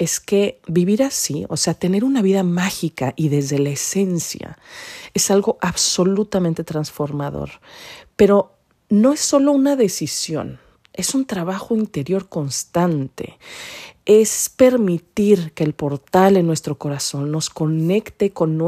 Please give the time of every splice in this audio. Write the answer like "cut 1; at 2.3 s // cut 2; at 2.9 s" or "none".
none

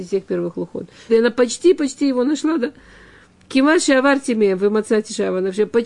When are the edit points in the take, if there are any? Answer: cut 1; at 1.1 s

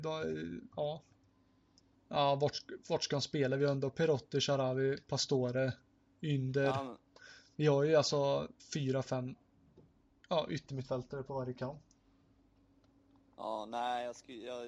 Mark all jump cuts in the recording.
cut 1; at 1.9 s

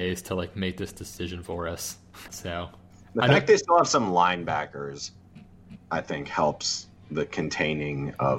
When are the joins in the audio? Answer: cut 1; at 2.3 s // cut 2; at 5.8 s

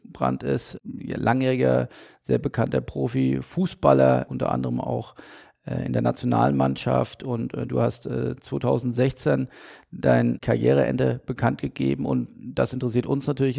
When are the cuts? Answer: none

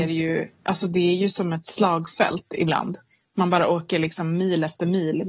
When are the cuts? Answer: none

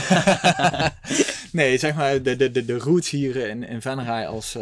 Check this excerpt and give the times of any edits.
none

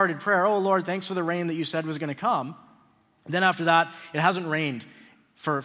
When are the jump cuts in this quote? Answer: cut 1; at 3.2 s

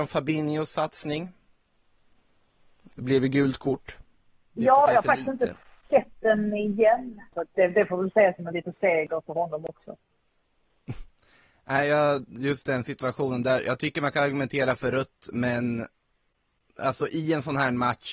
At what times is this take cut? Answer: cut 1; at 7.3 s

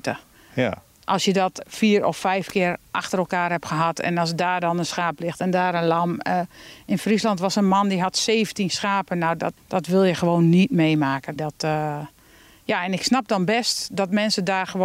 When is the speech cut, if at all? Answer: cut 1; at 9.6 s // cut 2; at 11.4 s

